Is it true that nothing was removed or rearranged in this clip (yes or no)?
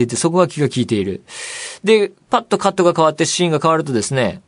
yes